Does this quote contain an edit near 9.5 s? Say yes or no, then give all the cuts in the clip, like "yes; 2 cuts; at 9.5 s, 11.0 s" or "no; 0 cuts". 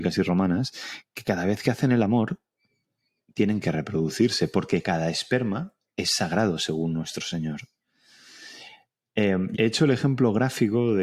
yes; 1 cut; at 9.5 s